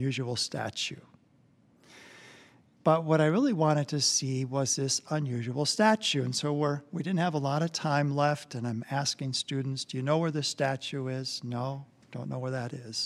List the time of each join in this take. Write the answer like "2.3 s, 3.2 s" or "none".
2.7 s